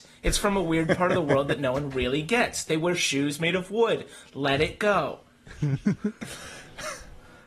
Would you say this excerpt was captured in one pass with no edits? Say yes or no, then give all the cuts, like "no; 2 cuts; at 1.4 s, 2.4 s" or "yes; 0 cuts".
yes; 0 cuts